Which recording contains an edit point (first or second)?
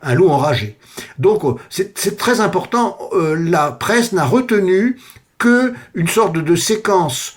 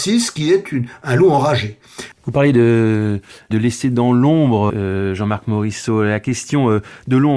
second